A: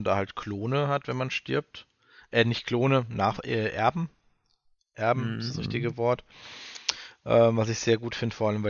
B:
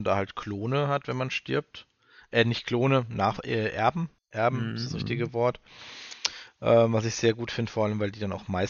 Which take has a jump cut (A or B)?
B